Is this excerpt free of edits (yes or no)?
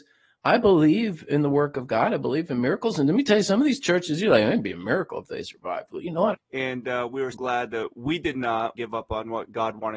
no